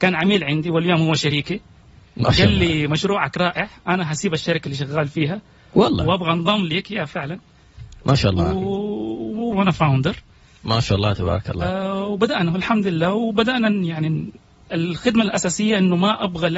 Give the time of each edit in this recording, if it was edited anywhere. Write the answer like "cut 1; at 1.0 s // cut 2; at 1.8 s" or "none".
cut 1; at 9.5 s